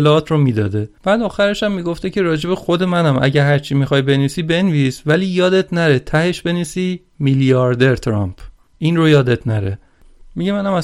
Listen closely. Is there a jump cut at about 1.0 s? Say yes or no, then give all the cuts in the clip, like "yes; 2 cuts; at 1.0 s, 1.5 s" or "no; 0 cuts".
yes; 1 cut; at 1.0 s